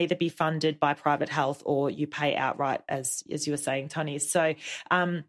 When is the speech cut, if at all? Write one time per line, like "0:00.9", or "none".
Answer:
none